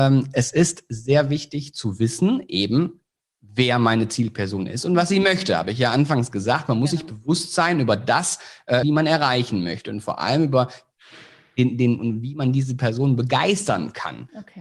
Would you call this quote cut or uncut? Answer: cut